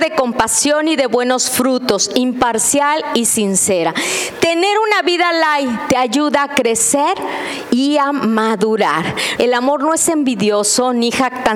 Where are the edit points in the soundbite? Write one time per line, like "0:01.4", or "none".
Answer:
0:09.4